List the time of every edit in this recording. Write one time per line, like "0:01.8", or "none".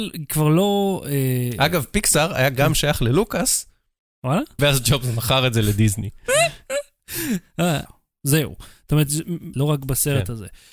0:04.6
0:07.9
0:09.5

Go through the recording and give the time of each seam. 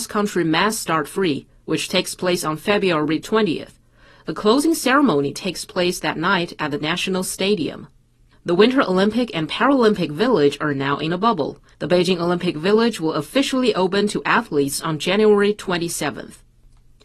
0:11.7

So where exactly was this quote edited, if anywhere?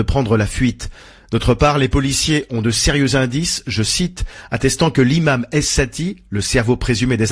none

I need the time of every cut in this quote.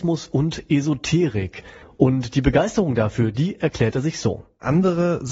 0:01.8

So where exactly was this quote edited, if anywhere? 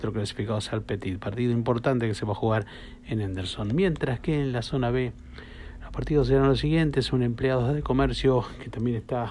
none

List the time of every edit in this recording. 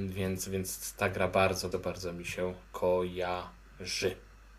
0:01.7

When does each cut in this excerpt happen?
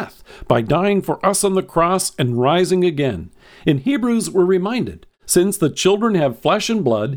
none

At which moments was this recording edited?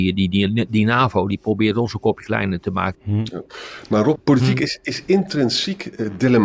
0:02.9
0:04.2

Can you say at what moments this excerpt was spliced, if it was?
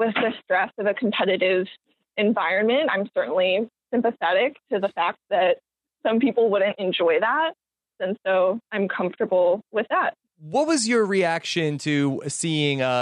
0:08.0

